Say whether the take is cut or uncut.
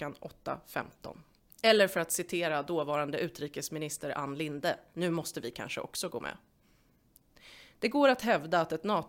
cut